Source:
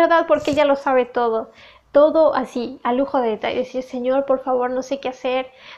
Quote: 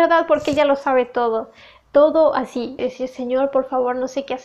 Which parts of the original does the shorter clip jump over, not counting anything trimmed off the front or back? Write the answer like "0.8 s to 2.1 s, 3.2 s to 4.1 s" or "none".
2.8 s to 3.5 s